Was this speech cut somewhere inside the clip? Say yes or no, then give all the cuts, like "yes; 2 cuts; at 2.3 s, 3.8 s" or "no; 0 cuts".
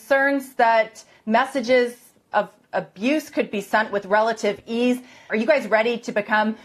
yes; 1 cut; at 5.3 s